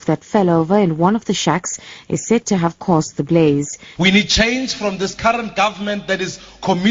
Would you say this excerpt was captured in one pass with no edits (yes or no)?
no